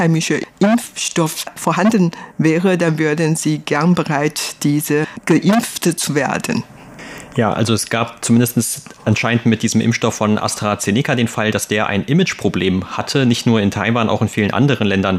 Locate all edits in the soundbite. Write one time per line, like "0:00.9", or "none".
none